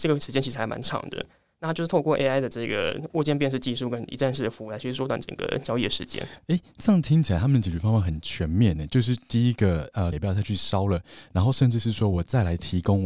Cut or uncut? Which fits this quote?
cut